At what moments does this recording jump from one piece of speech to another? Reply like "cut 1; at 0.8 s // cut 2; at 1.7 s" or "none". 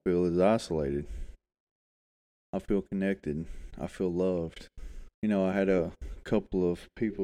cut 1; at 5.1 s